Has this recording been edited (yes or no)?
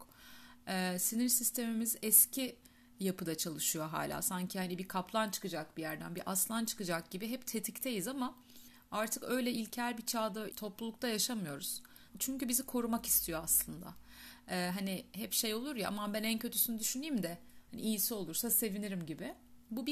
yes